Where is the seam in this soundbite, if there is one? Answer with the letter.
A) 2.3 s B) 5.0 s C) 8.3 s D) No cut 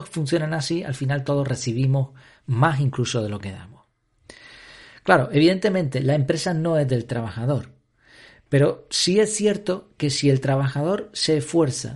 D